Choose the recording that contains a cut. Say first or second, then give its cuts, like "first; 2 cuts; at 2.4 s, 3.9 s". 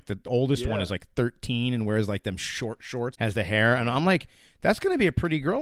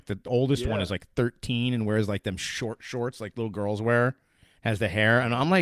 first; 1 cut; at 3.1 s